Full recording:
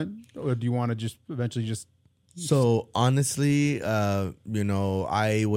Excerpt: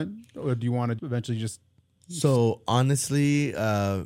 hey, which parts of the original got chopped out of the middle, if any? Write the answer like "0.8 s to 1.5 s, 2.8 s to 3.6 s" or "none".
1.0 s to 1.2 s